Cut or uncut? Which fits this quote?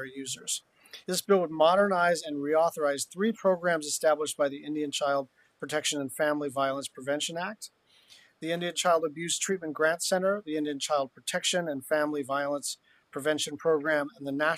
cut